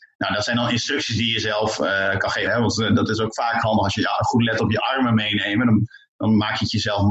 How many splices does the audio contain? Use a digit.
1